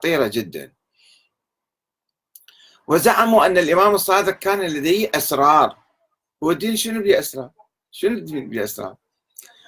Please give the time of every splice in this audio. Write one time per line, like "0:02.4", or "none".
none